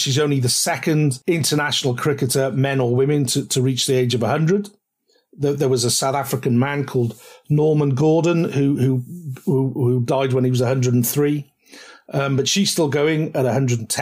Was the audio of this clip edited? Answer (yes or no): no